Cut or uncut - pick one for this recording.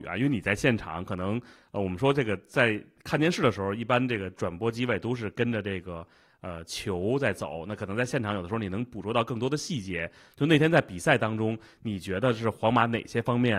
uncut